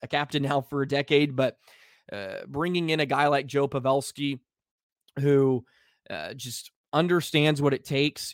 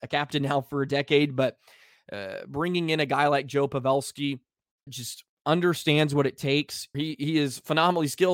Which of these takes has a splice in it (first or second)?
second